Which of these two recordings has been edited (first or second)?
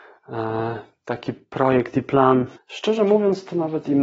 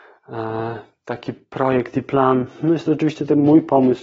first